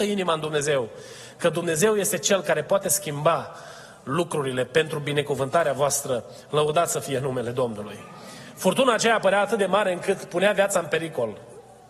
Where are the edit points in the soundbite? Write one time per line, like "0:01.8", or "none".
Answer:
none